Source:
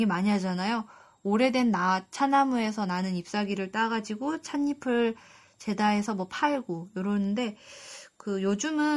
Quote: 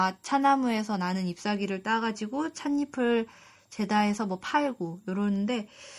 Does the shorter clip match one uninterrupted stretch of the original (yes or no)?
yes